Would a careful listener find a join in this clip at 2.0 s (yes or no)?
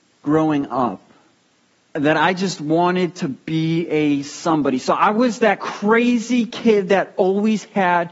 yes